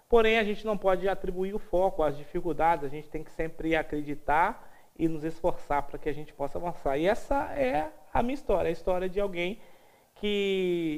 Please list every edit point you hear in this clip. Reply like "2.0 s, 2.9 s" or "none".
none